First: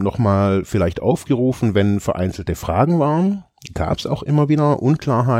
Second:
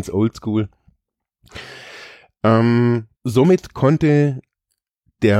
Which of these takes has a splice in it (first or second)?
second